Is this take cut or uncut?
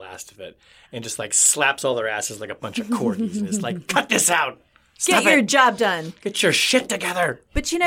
uncut